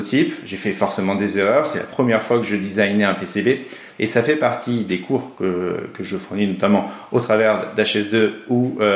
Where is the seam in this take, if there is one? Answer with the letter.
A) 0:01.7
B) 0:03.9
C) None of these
B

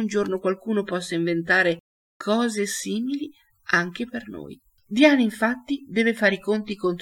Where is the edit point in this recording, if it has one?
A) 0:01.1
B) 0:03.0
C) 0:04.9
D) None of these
C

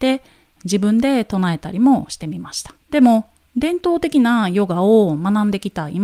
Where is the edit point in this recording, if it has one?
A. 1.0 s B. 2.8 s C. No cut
B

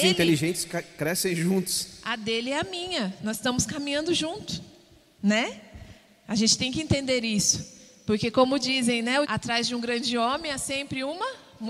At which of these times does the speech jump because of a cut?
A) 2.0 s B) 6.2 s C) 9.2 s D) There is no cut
C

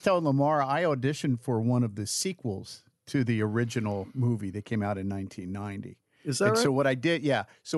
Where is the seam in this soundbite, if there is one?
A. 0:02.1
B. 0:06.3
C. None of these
C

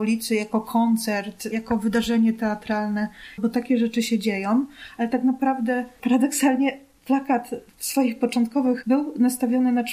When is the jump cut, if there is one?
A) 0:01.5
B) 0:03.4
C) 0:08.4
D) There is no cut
B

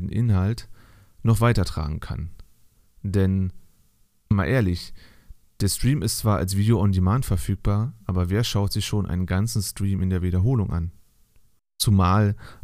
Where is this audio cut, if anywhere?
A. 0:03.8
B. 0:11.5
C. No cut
C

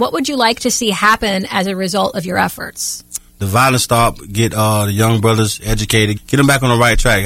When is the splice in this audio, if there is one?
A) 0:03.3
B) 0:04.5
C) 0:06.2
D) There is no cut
C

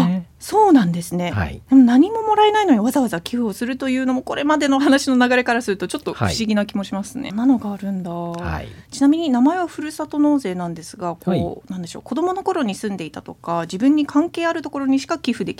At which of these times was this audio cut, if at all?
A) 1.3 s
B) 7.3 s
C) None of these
B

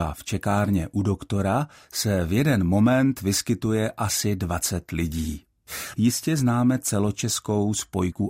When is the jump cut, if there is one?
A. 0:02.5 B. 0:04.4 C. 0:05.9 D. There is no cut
C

